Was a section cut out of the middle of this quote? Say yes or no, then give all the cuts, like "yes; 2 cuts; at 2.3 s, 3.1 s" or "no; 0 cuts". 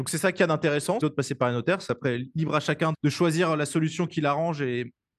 yes; 2 cuts; at 1.0 s, 2.9 s